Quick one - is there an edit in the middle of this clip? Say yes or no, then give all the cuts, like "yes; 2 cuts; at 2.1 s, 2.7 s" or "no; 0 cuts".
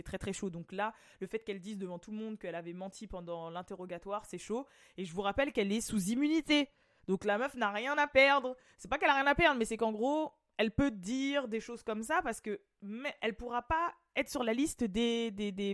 no; 0 cuts